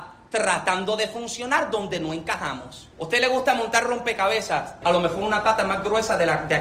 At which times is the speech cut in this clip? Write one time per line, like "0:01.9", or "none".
0:02.9
0:04.8